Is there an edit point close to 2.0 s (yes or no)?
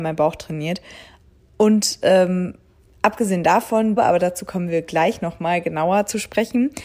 no